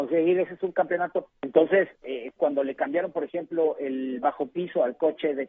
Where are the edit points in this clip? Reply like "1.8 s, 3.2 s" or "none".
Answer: 1.3 s, 2.4 s